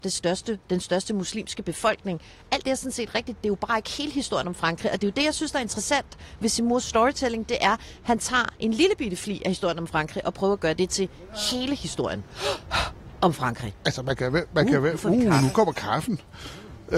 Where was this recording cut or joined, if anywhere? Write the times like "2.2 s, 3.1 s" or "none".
none